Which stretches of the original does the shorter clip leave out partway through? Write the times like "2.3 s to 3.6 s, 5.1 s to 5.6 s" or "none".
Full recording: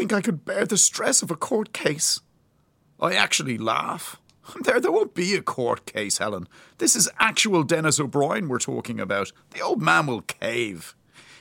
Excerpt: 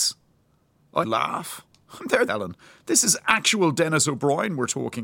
3.1 s to 3.6 s, 4.8 s to 6.2 s